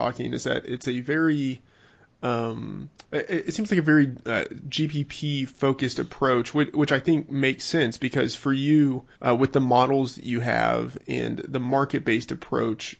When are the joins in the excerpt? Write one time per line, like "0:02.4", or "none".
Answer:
0:09.1